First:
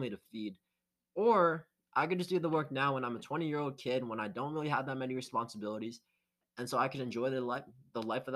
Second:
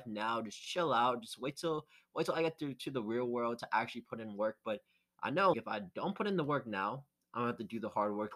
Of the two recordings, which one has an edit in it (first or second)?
second